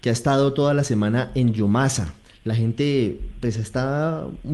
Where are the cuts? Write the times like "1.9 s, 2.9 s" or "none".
none